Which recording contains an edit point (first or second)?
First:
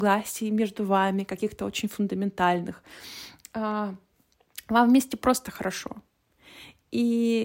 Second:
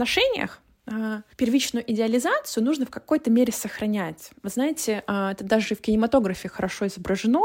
second